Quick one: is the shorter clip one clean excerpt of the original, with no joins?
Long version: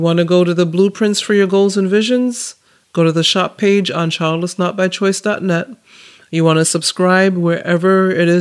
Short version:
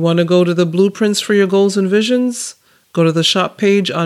yes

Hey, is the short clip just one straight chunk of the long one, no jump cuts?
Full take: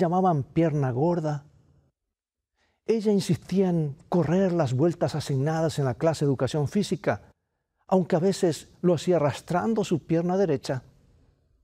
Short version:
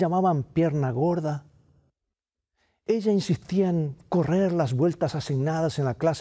yes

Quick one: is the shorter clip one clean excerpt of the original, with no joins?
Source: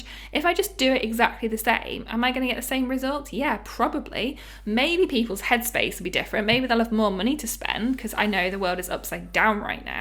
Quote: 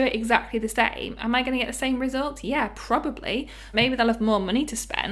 no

